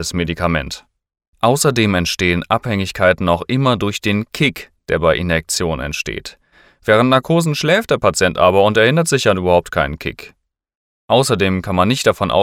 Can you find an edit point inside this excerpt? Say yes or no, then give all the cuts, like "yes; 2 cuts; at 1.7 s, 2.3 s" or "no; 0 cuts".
yes; 1 cut; at 1.3 s